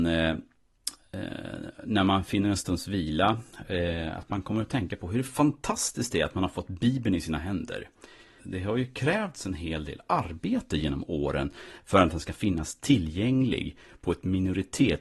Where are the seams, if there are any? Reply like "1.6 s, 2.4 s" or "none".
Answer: 8.4 s